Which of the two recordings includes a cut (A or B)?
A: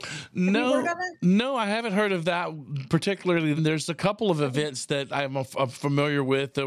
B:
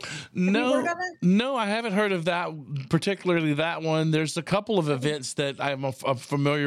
A